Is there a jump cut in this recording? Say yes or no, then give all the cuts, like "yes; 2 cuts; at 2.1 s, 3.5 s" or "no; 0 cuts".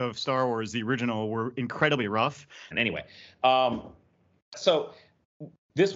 yes; 2 cuts; at 2.7 s, 4.5 s